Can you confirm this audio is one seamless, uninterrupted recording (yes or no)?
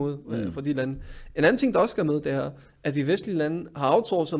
yes